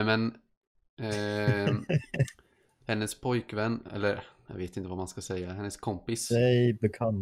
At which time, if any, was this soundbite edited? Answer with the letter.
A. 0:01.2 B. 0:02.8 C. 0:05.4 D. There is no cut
D